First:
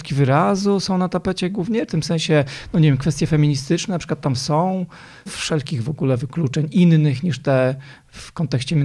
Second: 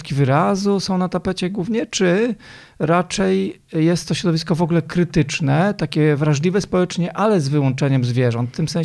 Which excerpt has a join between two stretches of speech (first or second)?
first